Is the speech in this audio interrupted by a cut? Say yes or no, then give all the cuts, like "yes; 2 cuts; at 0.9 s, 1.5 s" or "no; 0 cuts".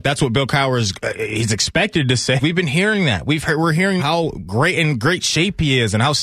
yes; 2 cuts; at 2.4 s, 4.0 s